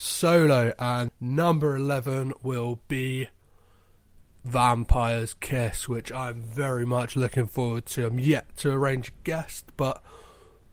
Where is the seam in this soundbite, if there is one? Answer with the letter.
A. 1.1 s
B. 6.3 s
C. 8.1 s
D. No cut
A